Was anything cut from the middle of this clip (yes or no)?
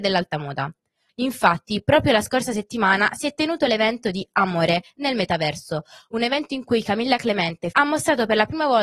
yes